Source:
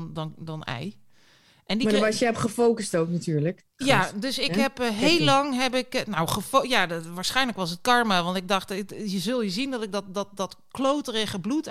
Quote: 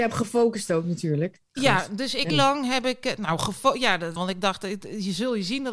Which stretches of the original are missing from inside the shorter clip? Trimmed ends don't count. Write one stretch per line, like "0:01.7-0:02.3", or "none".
0:04.5-0:05.2
0:07.1-0:08.2